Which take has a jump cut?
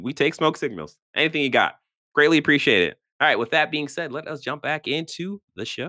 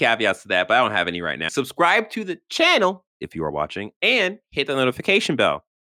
second; 1 cut; at 1.5 s

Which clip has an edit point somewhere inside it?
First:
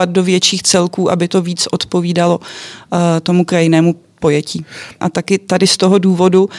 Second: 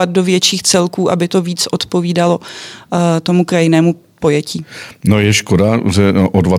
first; 1 cut; at 5.0 s

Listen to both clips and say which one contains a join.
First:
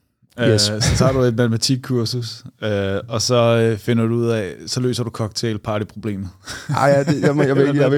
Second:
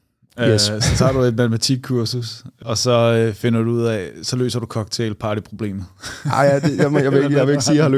second; 1 cut; at 2.6 s

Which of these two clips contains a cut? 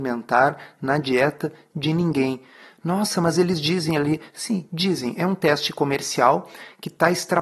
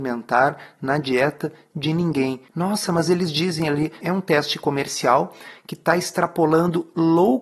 second; 2 cuts; at 2.5 s, 4.0 s

